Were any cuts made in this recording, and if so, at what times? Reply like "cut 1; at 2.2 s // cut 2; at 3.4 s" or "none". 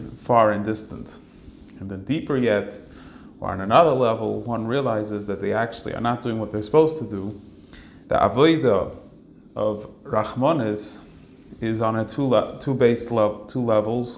cut 1; at 8.0 s